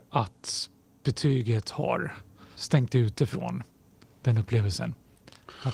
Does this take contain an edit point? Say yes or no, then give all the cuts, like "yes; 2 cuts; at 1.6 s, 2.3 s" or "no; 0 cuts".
yes; 1 cut; at 2.6 s